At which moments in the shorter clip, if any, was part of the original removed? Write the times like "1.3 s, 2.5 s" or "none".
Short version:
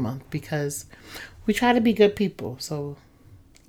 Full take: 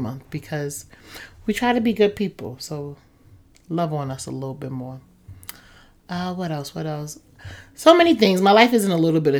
none

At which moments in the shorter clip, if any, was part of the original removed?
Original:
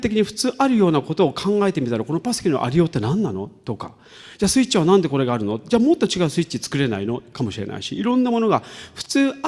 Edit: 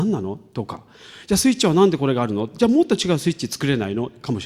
none

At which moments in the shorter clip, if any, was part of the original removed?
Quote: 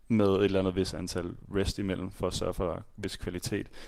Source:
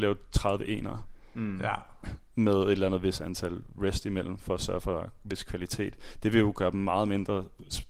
none

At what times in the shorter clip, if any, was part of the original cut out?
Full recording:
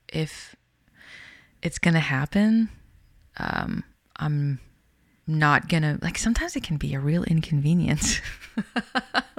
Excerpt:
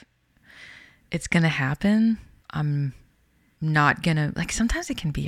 2.4 s

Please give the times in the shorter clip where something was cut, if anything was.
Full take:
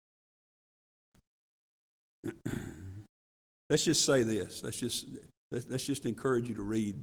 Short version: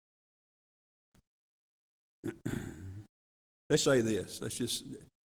3.8 s

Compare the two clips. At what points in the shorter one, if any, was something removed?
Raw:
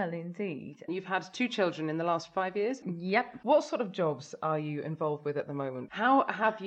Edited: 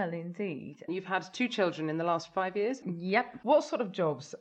none

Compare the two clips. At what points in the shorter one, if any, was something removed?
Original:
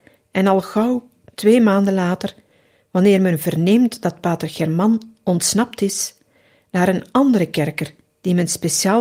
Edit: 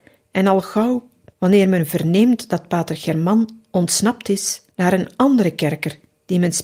1.3 s, 4.7 s

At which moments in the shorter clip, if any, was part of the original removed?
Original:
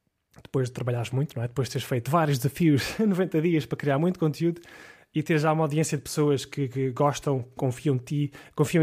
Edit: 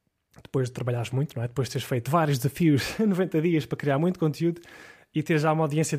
none

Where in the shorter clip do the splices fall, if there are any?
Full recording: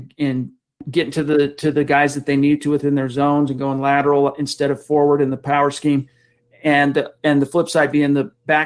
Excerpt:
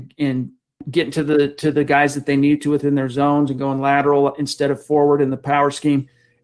none

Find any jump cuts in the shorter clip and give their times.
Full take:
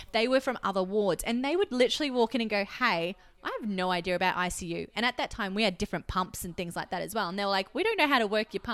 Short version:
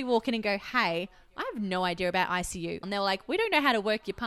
2.8 s

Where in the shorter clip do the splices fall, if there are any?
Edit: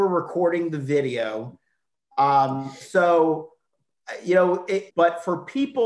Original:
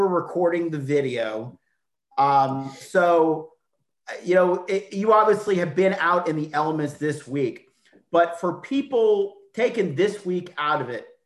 4.9 s

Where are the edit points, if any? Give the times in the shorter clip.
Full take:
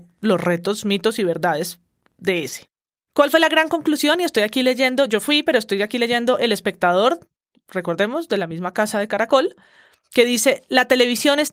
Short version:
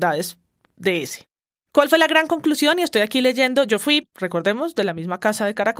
4.0 s

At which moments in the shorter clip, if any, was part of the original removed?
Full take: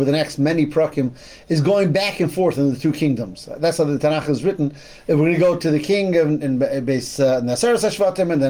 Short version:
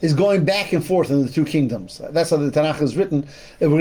none

